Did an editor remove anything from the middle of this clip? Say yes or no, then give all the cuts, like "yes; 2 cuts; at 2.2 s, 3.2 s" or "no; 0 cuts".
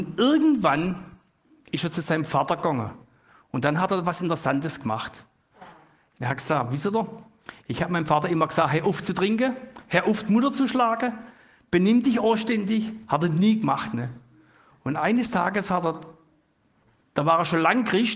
yes; 1 cut; at 6.1 s